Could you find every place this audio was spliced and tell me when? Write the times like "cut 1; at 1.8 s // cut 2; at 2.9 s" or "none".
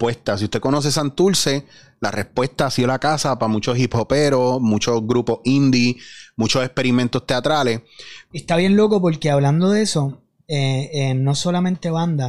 cut 1; at 8.3 s